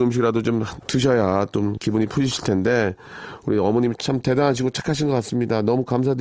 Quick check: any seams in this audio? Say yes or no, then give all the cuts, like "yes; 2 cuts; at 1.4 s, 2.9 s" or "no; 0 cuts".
yes; 1 cut; at 3.9 s